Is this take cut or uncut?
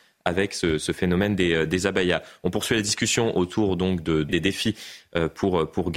cut